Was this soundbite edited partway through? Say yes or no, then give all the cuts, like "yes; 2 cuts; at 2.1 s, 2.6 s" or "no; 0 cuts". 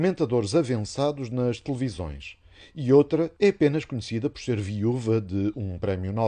yes; 1 cut; at 3.4 s